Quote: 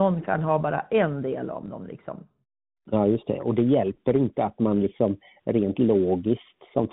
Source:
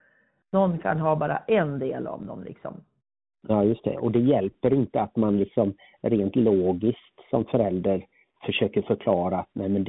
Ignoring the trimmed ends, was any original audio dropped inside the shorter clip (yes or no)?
no